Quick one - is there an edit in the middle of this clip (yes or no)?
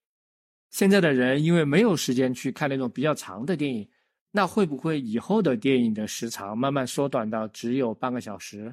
no